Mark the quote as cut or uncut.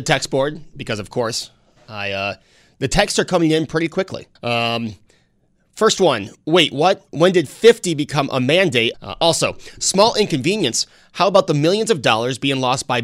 cut